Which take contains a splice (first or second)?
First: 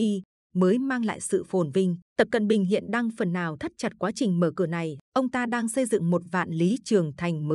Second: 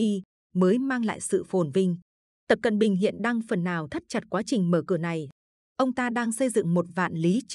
first